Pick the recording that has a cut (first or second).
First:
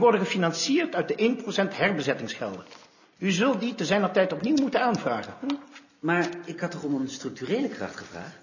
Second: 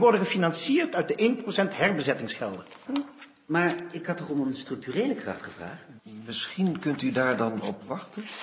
second